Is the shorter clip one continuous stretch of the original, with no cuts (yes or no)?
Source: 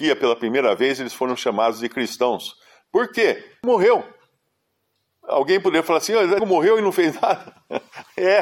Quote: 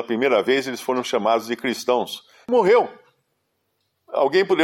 no